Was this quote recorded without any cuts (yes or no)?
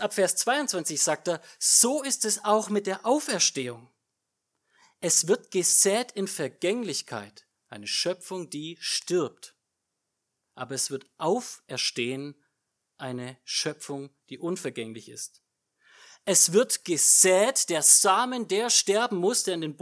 yes